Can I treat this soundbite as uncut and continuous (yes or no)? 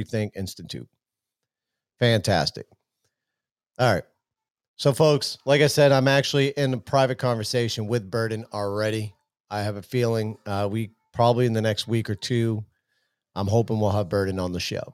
yes